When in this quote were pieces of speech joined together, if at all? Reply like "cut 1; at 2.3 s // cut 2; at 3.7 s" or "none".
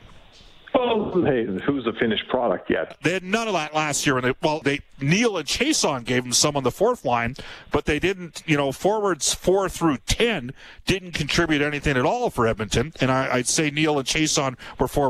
cut 1; at 2.9 s // cut 2; at 4.6 s